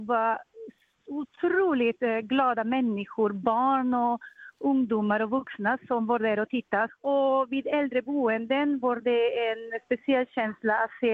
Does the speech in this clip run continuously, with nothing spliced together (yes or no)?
no